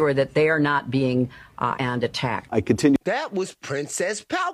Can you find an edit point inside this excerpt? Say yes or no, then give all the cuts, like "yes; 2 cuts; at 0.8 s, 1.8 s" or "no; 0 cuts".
yes; 1 cut; at 1.7 s